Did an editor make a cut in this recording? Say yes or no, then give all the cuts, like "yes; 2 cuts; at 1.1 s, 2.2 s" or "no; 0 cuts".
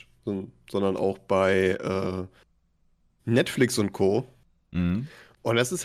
no; 0 cuts